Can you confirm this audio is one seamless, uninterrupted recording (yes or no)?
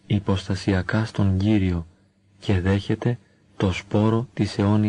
yes